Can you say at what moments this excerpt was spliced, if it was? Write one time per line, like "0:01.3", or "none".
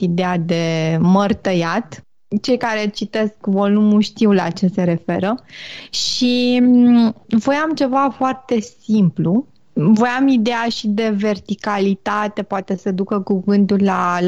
none